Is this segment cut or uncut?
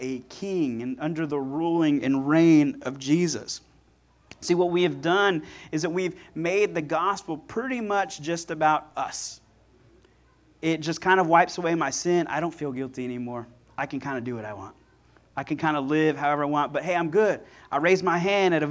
uncut